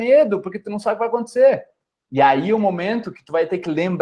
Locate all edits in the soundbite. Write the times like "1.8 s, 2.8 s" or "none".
none